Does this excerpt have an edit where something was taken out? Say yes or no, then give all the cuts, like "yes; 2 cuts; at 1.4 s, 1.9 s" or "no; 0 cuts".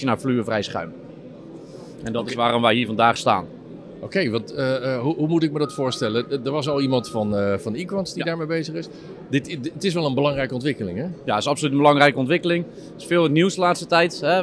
no; 0 cuts